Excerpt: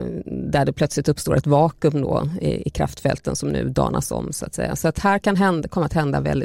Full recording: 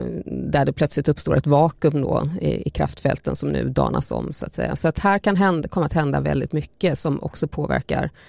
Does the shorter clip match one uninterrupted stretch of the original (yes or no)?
yes